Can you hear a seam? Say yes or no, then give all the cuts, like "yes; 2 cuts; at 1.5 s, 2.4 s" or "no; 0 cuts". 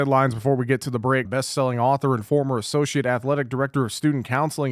yes; 1 cut; at 1.3 s